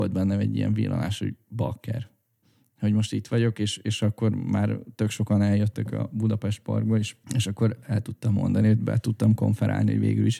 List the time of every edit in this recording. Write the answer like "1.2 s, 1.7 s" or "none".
7.2 s